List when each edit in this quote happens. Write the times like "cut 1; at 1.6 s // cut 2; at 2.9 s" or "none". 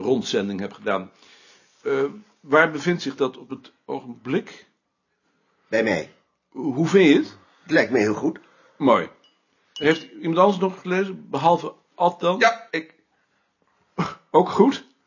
cut 1; at 12.7 s

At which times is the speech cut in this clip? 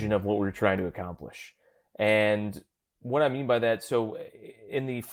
none

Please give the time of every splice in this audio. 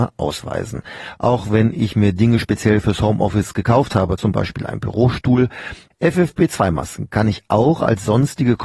cut 1; at 4.2 s // cut 2; at 5.9 s

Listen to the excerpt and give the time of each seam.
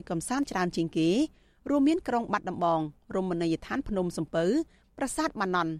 none

